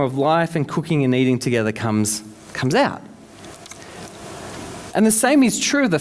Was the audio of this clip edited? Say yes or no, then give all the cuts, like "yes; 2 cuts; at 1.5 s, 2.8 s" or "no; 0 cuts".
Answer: yes; 1 cut; at 4.9 s